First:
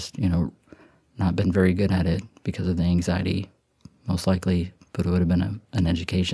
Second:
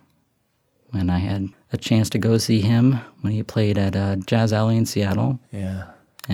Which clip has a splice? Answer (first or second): second